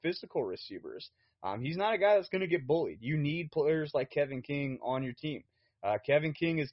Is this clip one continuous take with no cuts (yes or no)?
yes